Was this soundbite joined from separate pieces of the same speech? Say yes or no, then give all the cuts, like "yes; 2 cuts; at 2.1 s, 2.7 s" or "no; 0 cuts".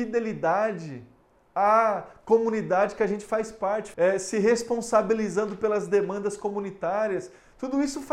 yes; 1 cut; at 3.9 s